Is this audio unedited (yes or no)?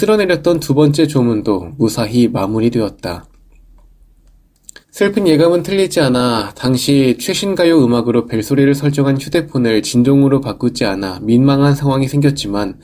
no